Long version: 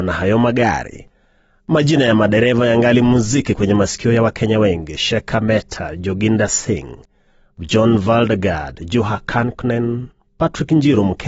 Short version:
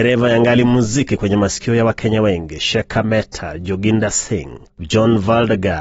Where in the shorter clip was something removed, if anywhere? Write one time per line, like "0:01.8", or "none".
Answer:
0:04.7